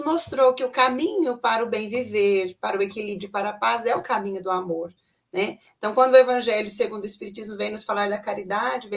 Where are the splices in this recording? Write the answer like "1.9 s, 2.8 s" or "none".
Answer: none